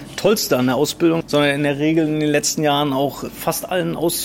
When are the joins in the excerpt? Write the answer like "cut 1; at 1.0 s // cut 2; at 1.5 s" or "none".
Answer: cut 1; at 1.2 s